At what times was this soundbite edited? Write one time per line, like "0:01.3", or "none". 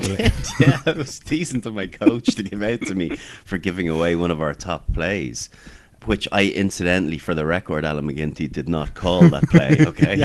none